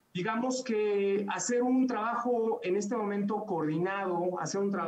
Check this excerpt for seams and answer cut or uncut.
uncut